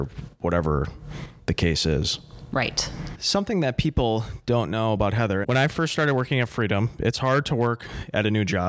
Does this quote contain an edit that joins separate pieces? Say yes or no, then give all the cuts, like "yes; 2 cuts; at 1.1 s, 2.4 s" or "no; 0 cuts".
yes; 2 cuts; at 3.1 s, 5.4 s